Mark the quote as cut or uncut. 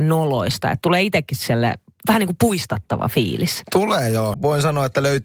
cut